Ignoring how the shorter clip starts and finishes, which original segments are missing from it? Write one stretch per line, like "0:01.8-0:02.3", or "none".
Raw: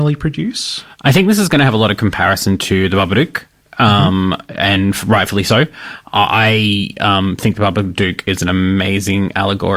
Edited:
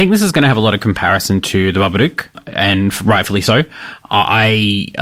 0:03.5-0:04.4